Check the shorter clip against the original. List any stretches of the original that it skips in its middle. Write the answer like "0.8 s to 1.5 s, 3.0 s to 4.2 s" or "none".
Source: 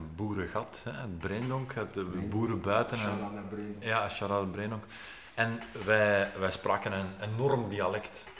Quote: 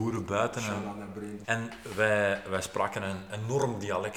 3.8 s to 5.3 s